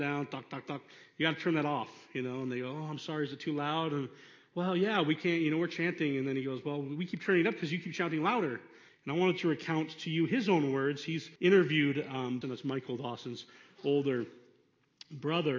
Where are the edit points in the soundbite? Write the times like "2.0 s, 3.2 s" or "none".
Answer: 8.9 s, 11.4 s, 12.4 s